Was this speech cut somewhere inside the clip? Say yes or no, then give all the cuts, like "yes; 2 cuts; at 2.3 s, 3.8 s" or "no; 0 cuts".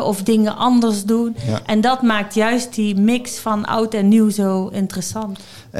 no; 0 cuts